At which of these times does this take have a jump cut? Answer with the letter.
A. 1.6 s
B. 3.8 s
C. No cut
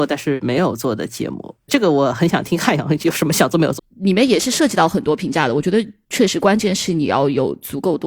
B